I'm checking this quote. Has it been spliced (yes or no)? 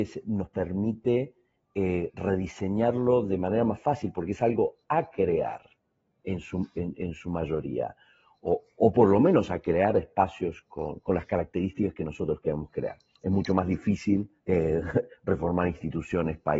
yes